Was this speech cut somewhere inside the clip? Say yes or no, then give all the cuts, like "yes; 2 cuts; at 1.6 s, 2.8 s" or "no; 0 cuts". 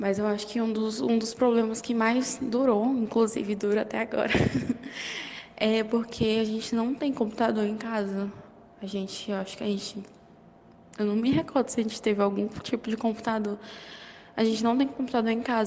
no; 0 cuts